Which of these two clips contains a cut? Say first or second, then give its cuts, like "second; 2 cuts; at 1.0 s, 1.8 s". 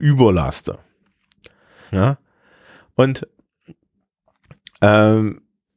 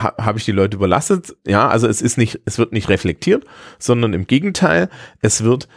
first; 1 cut; at 1.9 s